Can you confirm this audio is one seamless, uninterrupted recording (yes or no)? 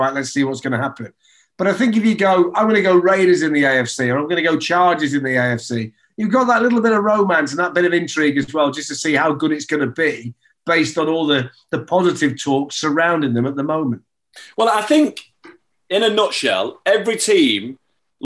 yes